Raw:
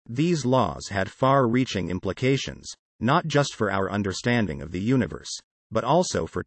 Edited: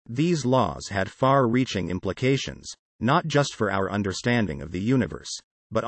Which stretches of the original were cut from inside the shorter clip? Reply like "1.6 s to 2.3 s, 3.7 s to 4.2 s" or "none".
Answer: none